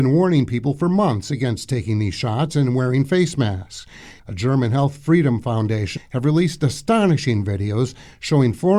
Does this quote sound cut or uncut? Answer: cut